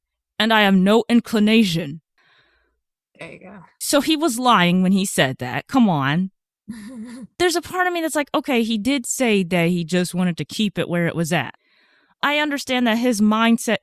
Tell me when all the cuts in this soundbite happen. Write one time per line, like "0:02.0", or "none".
none